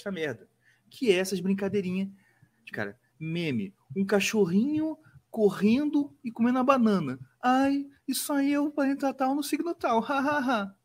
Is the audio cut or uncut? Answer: cut